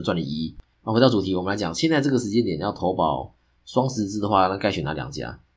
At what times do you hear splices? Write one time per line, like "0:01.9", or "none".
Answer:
none